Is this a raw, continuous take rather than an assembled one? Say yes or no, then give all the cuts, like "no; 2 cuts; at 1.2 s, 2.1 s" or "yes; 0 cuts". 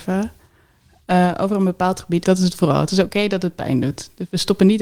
no; 1 cut; at 2.2 s